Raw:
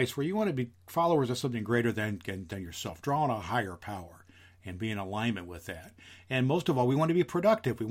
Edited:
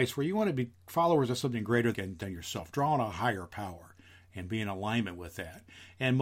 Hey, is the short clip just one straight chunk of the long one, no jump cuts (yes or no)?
no